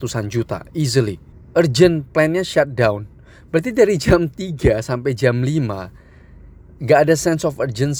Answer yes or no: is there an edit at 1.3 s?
yes